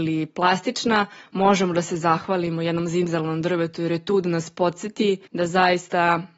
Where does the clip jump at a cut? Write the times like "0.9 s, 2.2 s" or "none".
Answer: 5.3 s